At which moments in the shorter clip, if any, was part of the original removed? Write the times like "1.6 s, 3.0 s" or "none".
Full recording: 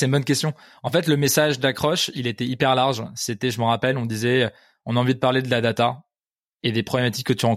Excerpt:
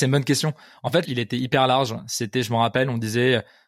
1.0 s